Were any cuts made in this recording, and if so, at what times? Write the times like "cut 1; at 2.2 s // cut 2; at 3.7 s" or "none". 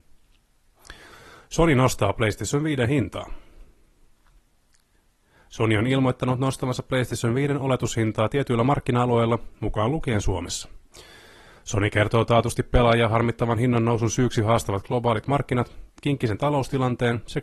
cut 1; at 15.9 s